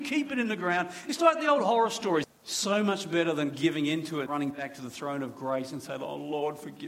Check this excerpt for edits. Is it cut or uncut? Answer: cut